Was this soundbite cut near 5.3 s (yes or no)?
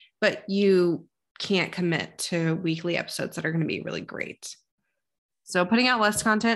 yes